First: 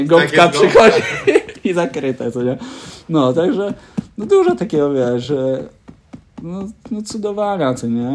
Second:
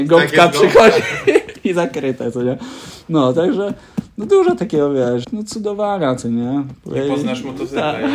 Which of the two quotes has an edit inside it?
second; 2 cuts; at 5.2 s, 6.7 s

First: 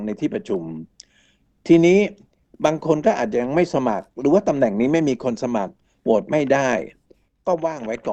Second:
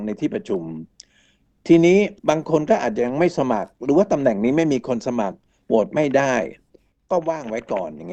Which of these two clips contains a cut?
second; 1 cut; at 2.2 s

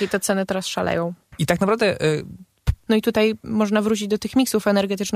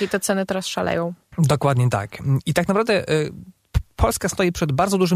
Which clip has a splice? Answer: first; 2 cuts; at 1.4 s, 2.9 s

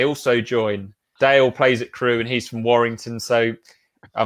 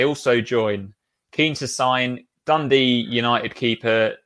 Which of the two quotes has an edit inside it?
first; 1 cut; at 1.2 s

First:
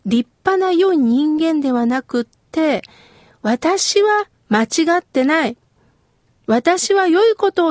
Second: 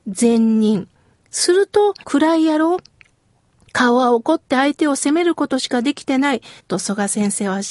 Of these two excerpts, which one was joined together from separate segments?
second; 2 cuts; at 2.0 s, 6.6 s

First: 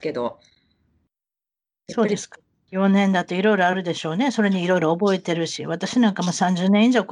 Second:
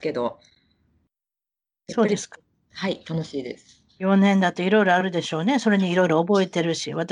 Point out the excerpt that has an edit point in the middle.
first; 1 cut; at 2.7 s

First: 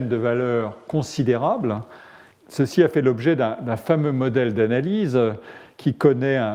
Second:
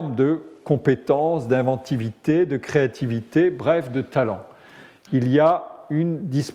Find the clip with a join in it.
first; 1 cut; at 2.3 s

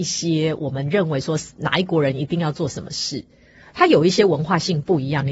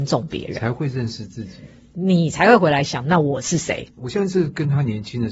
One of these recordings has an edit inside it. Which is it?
second; 1 cut; at 4.0 s

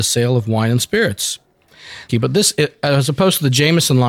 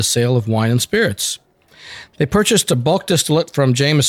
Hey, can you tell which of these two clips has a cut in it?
first; 1 cut; at 2.1 s

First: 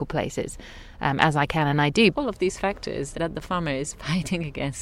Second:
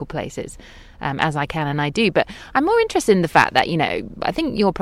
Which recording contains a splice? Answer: first; 2 cuts; at 2.1 s, 3.1 s

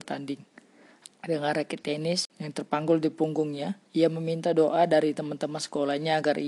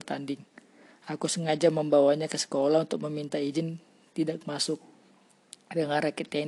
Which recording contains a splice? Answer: first; 3 cuts; at 1.0 s, 2.3 s, 3.8 s

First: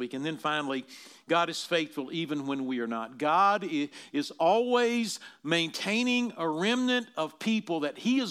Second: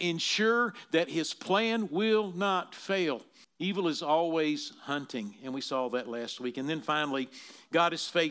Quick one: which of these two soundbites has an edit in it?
second; 1 cut; at 3.4 s

